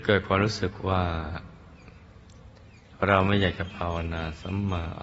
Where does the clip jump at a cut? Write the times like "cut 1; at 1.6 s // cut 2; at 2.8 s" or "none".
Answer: none